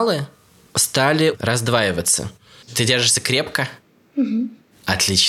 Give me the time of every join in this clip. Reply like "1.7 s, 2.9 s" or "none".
2.6 s